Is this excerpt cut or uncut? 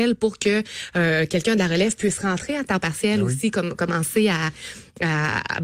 uncut